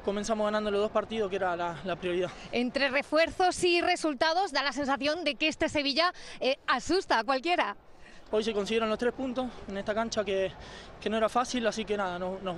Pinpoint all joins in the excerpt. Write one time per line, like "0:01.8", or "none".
0:08.3

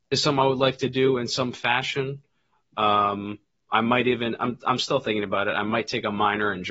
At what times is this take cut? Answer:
none

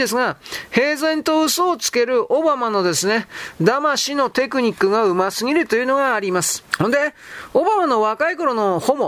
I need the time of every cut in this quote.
0:06.7

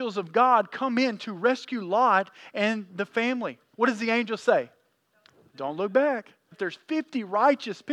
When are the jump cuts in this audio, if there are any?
0:03.7
0:06.5

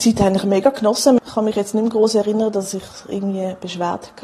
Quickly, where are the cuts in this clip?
0:01.2

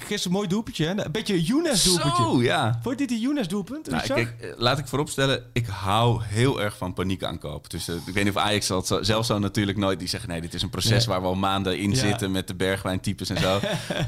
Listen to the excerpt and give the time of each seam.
none

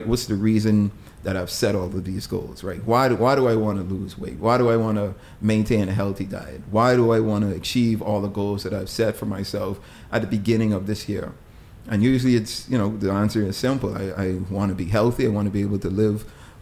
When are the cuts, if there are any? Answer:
none

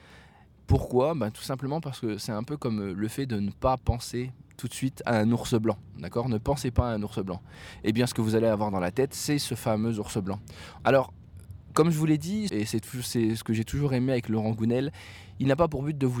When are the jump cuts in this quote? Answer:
0:10.8
0:12.5

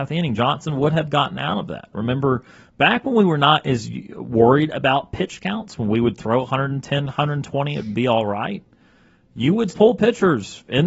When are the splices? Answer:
0:01.9
0:09.7

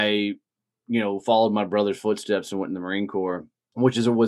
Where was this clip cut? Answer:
none

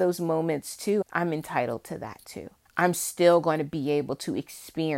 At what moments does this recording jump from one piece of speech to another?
0:01.0
0:02.7

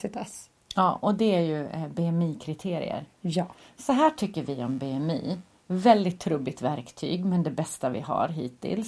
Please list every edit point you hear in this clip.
none

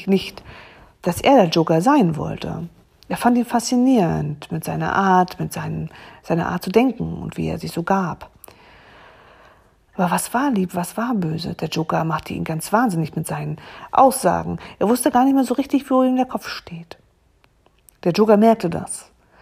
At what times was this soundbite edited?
0:09.9

